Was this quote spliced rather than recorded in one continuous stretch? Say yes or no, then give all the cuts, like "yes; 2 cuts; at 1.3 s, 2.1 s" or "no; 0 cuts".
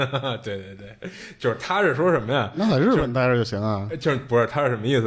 no; 0 cuts